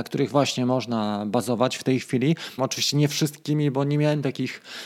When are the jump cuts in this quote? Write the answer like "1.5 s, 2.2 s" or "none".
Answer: 2.6 s

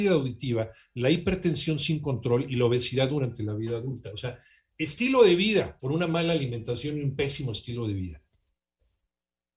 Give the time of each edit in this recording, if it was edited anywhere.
5.8 s

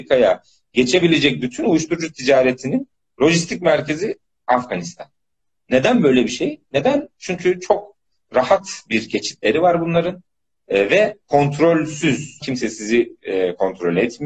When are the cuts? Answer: 12.4 s

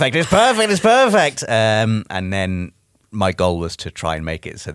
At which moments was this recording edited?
none

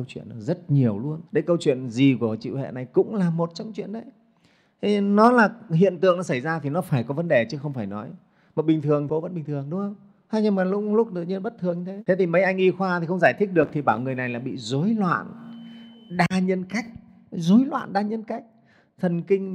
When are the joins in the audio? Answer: 1.3 s

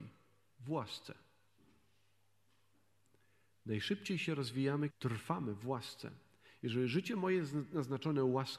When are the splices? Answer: 4.9 s

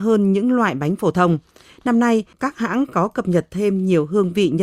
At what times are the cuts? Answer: 2.3 s

